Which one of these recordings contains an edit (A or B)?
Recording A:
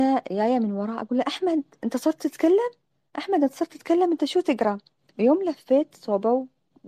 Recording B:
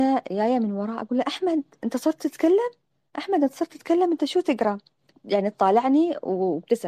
B